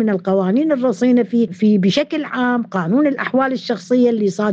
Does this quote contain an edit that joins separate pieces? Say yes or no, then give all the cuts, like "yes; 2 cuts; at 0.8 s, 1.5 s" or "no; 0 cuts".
yes; 1 cut; at 1.5 s